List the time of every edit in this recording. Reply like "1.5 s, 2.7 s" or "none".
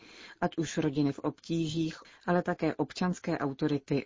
2.0 s